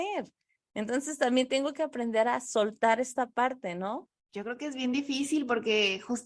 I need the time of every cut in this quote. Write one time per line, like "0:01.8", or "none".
0:04.2

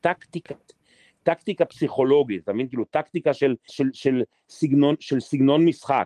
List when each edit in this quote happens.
0:03.7

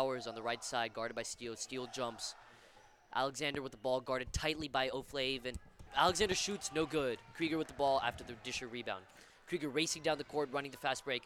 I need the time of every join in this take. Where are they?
0:05.9

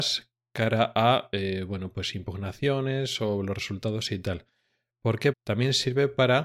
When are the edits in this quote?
0:05.3

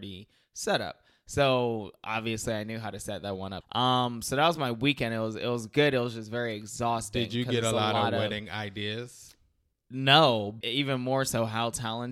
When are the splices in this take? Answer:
0:03.6
0:10.6

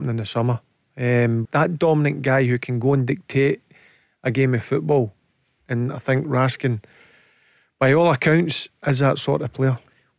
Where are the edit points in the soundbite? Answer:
0:01.5

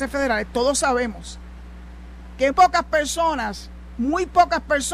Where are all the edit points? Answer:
0:02.5

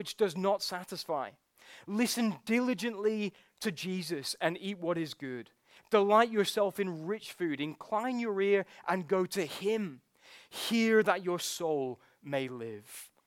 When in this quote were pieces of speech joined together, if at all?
none

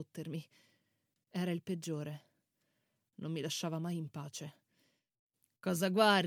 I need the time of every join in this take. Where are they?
0:01.2

